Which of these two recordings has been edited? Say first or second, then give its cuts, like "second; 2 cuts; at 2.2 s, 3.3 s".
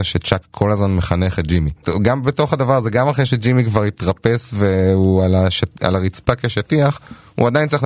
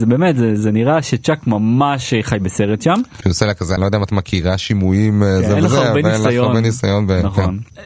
second; 1 cut; at 3.2 s